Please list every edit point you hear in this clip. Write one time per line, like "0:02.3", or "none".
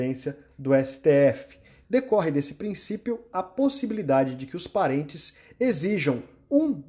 0:01.8